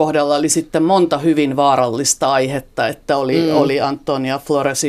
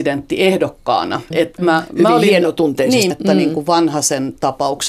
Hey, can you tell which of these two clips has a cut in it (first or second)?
second